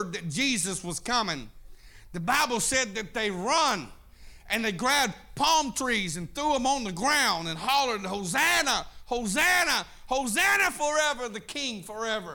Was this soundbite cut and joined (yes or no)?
no